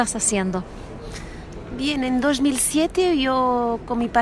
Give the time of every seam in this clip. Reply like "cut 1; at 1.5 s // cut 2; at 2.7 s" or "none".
none